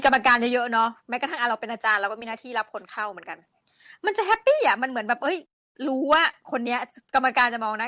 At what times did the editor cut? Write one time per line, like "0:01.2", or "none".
none